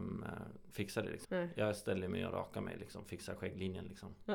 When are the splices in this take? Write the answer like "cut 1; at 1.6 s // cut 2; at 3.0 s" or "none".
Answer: cut 1; at 1.2 s